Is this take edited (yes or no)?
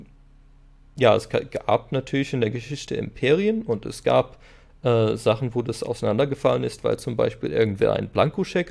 no